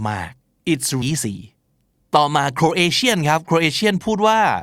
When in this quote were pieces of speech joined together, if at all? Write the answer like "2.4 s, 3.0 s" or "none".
1.0 s